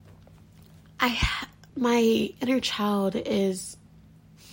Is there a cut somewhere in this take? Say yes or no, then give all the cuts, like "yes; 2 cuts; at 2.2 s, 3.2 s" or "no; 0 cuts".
yes; 1 cut; at 1.7 s